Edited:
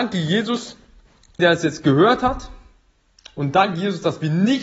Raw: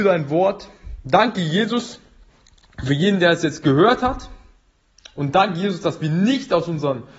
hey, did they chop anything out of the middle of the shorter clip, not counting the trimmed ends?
yes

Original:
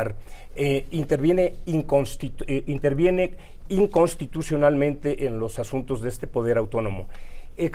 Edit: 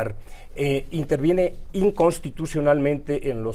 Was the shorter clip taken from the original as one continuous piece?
no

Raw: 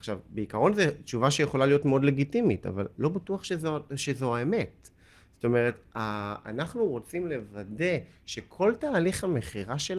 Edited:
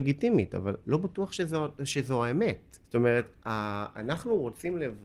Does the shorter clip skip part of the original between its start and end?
yes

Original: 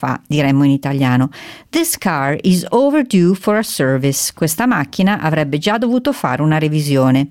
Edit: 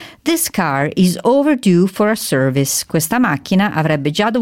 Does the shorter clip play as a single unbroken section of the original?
yes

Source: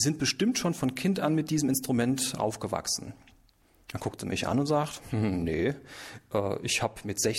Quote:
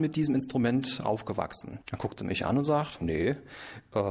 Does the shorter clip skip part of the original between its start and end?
yes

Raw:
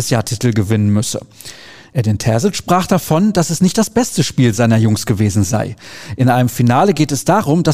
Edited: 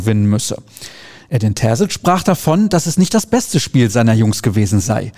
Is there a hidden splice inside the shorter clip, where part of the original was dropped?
no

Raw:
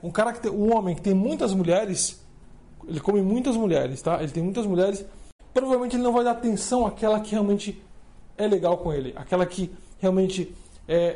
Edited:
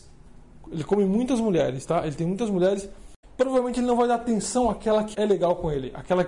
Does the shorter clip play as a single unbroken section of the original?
no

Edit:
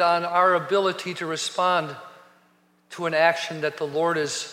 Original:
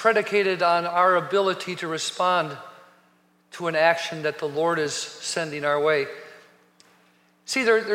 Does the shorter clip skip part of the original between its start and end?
no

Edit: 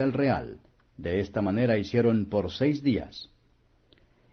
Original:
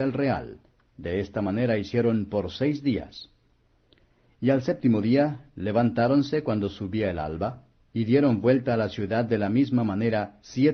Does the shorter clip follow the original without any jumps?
yes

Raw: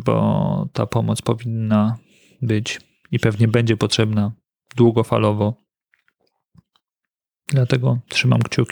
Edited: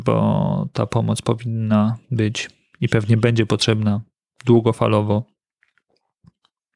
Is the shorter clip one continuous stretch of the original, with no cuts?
no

